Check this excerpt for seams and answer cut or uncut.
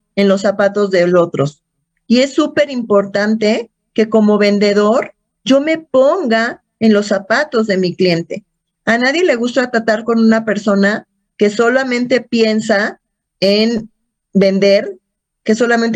uncut